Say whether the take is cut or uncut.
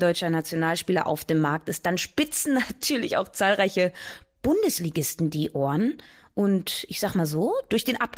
uncut